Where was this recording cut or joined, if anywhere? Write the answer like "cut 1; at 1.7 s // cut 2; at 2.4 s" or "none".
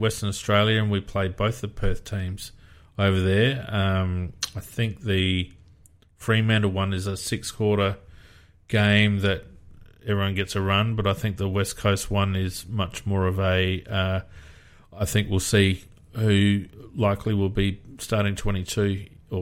none